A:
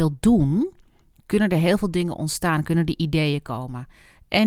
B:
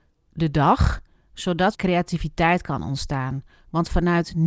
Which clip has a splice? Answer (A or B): B